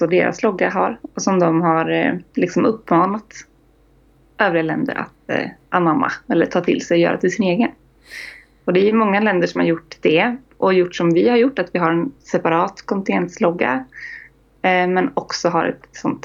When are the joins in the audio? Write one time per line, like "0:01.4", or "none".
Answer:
none